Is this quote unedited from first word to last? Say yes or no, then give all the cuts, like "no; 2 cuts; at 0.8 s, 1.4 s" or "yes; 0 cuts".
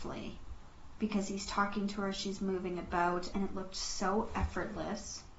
no; 2 cuts; at 1.0 s, 3.3 s